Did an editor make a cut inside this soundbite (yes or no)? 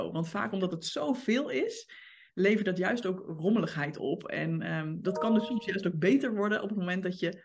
yes